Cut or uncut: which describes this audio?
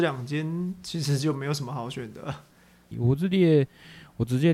cut